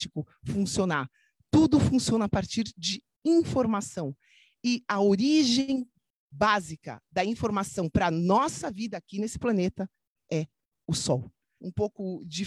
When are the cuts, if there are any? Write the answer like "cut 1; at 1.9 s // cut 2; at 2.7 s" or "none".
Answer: cut 1; at 11.6 s